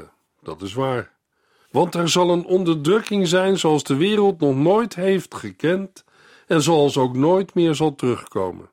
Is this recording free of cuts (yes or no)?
no